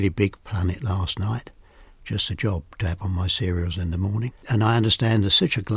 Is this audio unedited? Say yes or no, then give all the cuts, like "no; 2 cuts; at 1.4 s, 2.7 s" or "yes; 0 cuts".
yes; 0 cuts